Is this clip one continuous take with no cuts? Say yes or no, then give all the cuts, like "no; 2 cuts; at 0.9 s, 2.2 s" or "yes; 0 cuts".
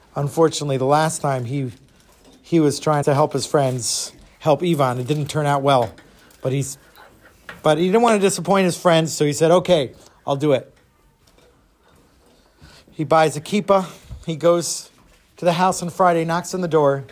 no; 1 cut; at 3.0 s